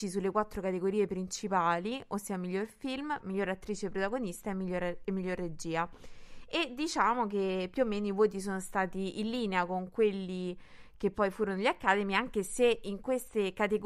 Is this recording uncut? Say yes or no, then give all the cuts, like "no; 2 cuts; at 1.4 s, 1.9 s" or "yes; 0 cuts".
no; 1 cut; at 3.2 s